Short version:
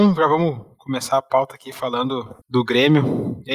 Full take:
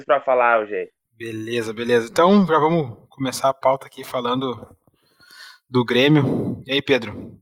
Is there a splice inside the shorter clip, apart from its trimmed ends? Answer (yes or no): yes